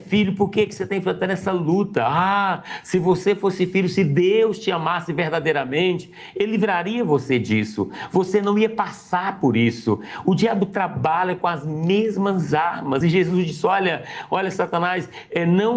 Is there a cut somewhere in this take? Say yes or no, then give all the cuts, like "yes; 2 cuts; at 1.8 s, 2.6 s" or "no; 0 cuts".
no; 0 cuts